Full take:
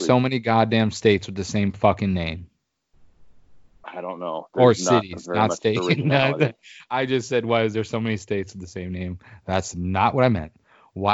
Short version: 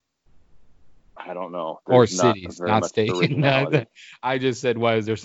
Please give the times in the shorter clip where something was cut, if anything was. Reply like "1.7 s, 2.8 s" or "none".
none